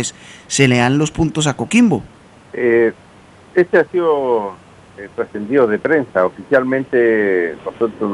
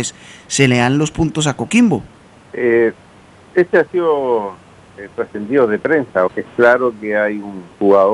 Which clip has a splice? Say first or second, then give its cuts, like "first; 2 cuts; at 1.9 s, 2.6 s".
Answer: second; 1 cut; at 6.3 s